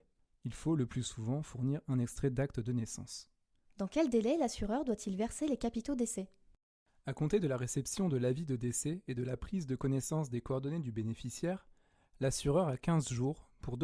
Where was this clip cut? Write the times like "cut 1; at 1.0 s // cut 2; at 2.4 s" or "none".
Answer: cut 1; at 3.6 s